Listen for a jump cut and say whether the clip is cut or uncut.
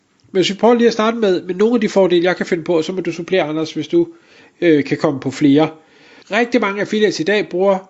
cut